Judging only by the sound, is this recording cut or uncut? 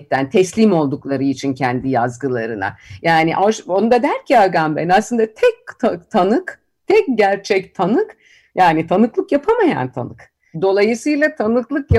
cut